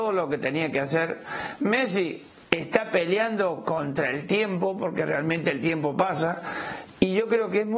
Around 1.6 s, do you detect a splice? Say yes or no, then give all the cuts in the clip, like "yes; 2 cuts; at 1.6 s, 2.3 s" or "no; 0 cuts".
no; 0 cuts